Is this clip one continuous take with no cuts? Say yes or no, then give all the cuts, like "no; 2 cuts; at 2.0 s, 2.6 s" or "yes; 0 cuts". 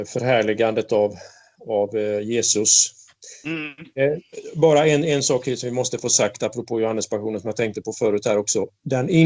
yes; 0 cuts